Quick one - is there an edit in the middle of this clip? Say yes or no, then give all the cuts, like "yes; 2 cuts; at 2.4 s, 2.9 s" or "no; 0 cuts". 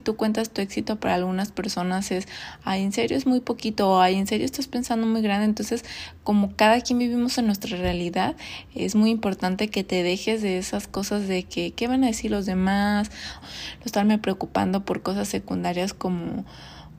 yes; 1 cut; at 13.4 s